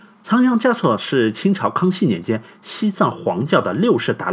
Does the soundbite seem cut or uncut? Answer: uncut